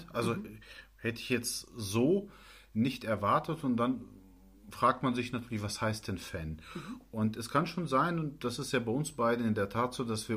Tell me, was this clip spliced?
no; 0 cuts

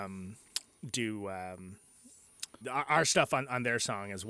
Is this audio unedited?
no; 1 cut; at 2.6 s

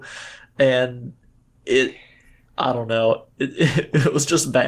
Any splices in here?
no; 0 cuts

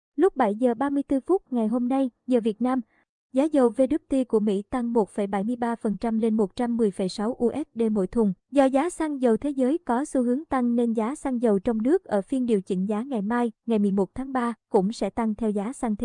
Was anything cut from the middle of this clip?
yes; 2 cuts; at 2.2 s, 8.4 s

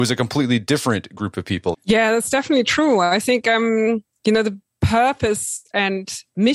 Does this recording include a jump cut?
yes; 1 cut; at 1.7 s

